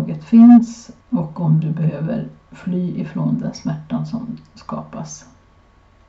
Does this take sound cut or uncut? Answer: cut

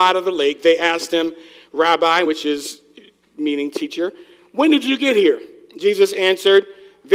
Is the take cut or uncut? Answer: uncut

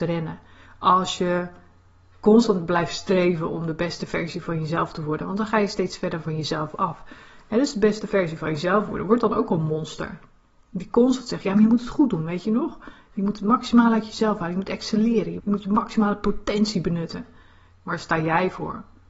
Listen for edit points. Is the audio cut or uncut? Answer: cut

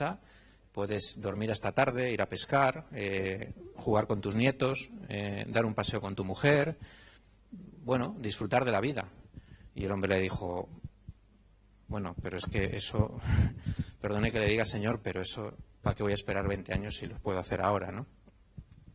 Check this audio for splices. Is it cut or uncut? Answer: uncut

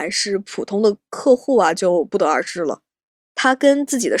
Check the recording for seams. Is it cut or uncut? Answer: uncut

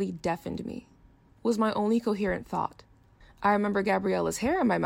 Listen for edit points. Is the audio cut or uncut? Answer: cut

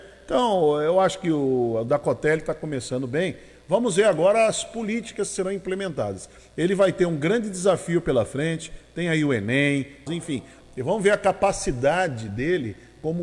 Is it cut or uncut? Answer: cut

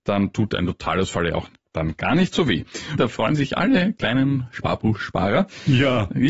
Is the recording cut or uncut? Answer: cut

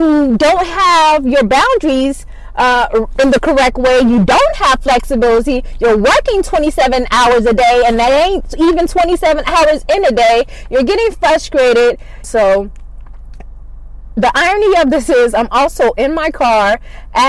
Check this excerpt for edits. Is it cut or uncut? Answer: cut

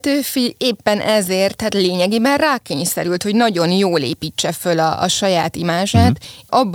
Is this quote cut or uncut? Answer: uncut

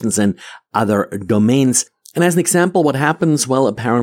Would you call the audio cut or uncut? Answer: uncut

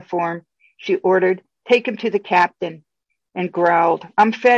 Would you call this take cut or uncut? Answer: uncut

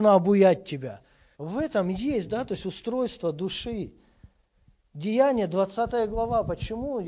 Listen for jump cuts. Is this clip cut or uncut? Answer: cut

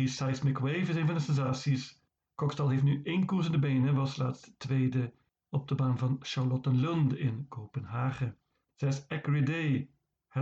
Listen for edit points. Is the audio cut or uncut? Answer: cut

